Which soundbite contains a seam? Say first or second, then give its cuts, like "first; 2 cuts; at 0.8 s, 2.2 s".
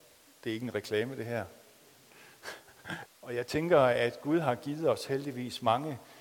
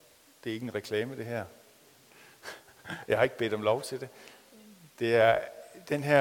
first; 1 cut; at 3.1 s